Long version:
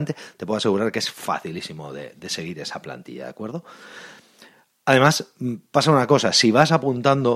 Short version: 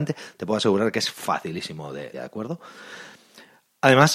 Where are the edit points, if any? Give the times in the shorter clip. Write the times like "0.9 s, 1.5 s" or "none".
2.1 s